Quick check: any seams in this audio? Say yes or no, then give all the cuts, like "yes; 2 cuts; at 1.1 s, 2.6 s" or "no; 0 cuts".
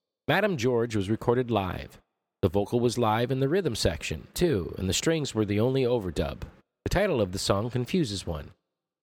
yes; 1 cut; at 4.3 s